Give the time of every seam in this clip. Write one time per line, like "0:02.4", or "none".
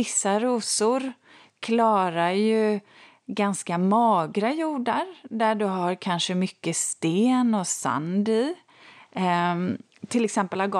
none